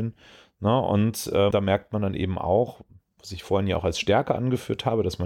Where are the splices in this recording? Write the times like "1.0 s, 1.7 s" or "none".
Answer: 1.5 s